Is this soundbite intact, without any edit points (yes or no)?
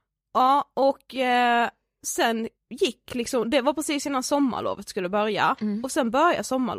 yes